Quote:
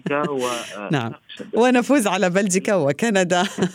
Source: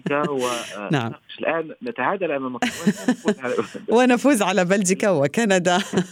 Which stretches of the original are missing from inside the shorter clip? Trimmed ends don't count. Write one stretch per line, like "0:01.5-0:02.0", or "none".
0:01.4-0:03.7

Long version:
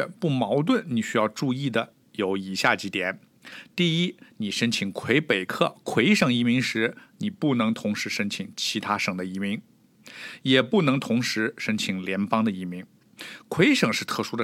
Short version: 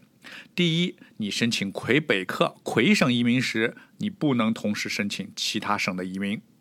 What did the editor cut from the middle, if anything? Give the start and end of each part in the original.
none

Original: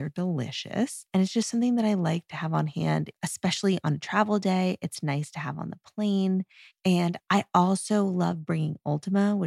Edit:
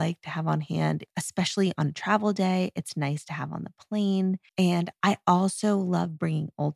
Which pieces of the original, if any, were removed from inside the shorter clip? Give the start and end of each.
0:06.6-0:06.8

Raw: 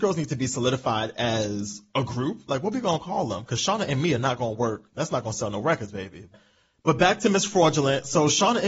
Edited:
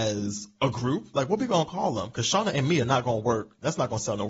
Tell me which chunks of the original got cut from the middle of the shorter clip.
none

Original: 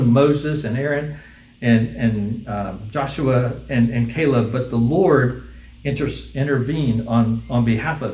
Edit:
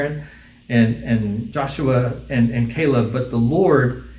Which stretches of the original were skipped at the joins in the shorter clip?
0:02.4-0:02.9

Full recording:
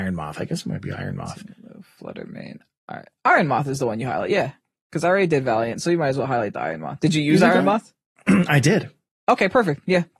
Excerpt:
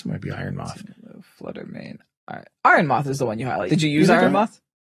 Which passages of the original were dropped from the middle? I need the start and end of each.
0:04.3-0:07.0

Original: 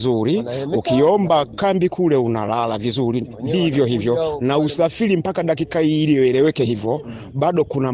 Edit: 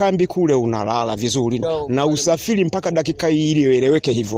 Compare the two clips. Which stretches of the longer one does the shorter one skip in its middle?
0:03.2-0:04.1

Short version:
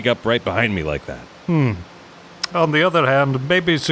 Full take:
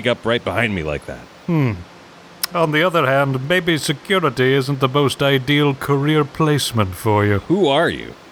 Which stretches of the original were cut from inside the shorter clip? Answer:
none

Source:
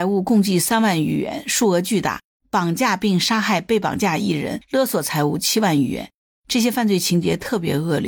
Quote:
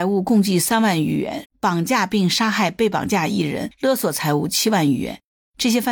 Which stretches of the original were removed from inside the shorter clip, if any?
0:01.4-0:02.3

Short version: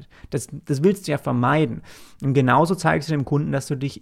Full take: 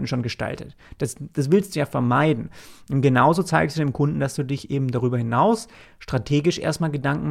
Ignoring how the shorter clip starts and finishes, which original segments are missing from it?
none

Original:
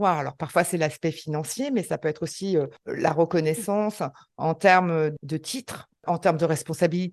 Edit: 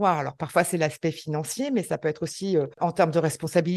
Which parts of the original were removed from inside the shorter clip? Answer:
0:02.7-0:06.0

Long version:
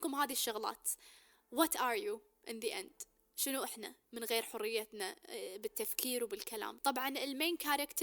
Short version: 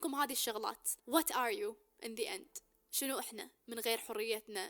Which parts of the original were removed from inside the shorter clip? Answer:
0:01.0-0:01.4

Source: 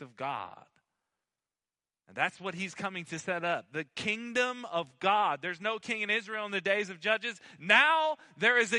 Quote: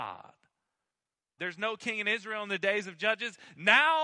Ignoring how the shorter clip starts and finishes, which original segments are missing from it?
0:01.7-0:05.4

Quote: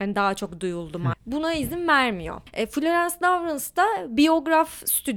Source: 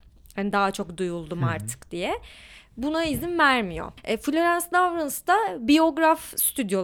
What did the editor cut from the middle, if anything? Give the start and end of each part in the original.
0:01.5-0:02.6

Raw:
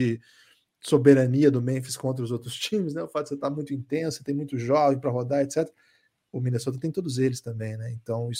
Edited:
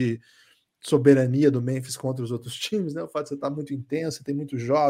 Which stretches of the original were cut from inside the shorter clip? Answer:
none

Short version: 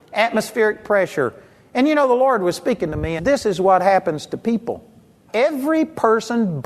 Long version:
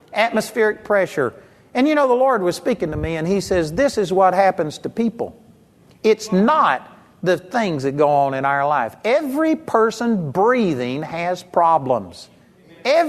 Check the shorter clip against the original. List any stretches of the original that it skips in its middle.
0:03.2-0:03.7
0:05.8-0:09.0

